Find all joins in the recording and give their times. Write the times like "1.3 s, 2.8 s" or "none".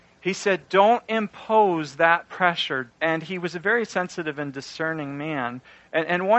2.9 s